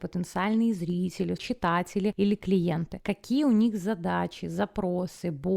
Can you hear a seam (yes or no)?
yes